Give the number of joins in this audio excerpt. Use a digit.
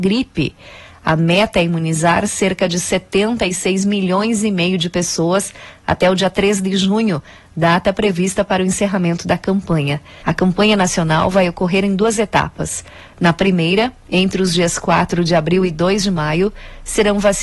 1